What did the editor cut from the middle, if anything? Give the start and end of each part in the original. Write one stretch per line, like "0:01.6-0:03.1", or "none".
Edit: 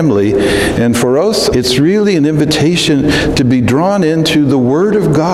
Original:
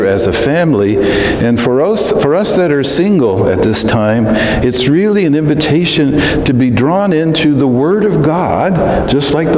0:02.1-0:04.6